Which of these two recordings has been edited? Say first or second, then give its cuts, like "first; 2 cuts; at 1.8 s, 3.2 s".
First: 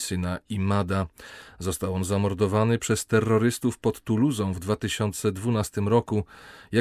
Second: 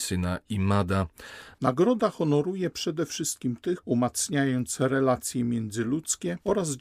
second; 2 cuts; at 1.5 s, 3.8 s